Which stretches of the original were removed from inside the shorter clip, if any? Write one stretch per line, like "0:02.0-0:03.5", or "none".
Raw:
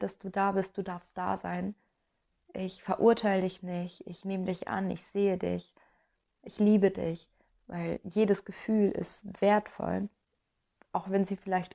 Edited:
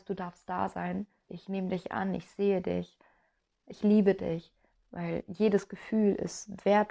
0:02.0-0:04.0